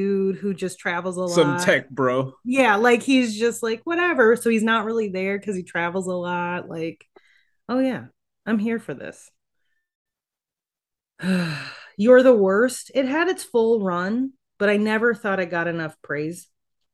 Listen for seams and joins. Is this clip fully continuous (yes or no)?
yes